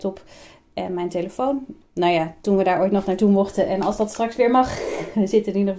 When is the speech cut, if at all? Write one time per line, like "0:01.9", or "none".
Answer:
0:01.8